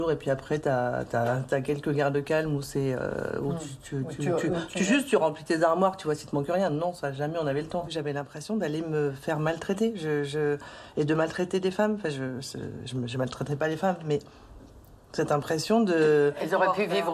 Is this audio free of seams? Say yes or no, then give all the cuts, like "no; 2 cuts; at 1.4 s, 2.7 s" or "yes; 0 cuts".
yes; 0 cuts